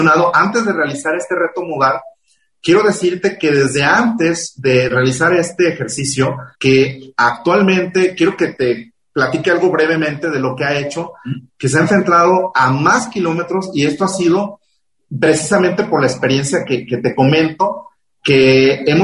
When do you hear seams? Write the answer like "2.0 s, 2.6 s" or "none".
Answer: 6.5 s, 11.5 s

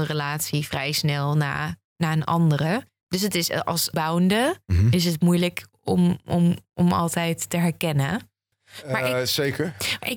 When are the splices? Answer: 3.9 s

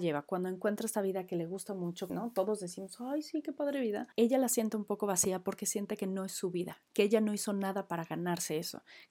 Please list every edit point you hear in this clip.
2.1 s, 4.1 s

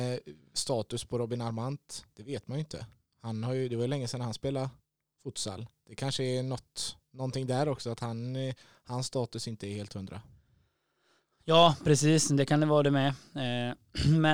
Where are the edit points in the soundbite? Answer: none

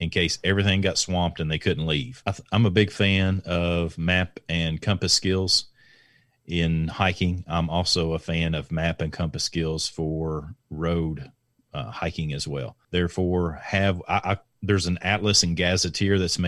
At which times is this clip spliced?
2.2 s, 12.8 s

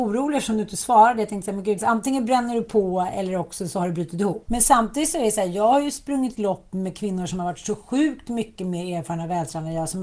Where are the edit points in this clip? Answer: 1.8 s, 4.5 s

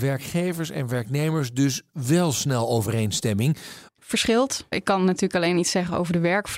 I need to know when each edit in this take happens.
3.9 s

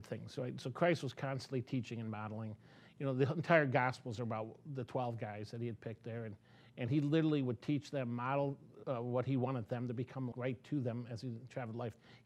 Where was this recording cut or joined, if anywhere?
8.8 s, 10.3 s

